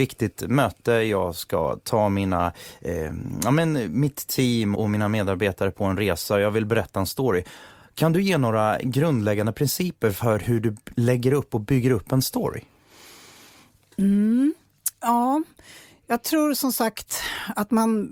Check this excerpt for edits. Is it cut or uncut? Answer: cut